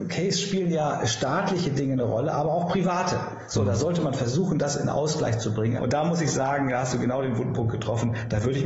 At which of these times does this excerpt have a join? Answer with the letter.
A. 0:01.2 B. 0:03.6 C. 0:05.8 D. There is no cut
C